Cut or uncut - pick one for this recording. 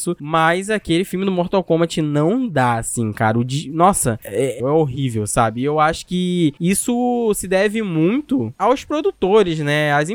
cut